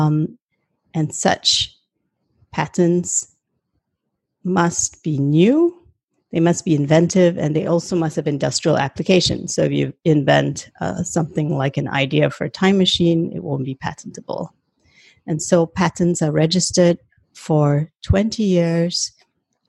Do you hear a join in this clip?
no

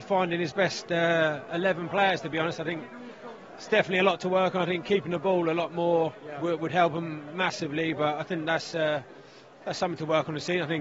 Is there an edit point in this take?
no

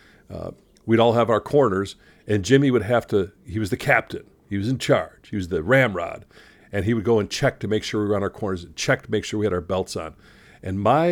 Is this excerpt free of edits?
no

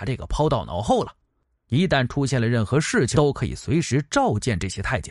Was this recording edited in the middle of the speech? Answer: yes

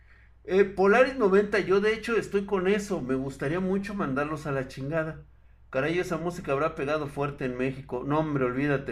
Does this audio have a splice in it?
no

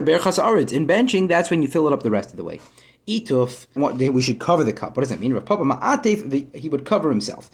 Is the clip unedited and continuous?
no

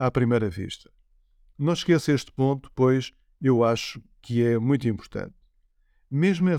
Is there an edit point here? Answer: yes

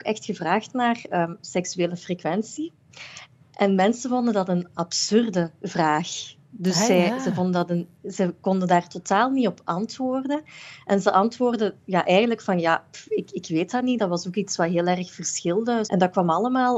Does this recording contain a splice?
yes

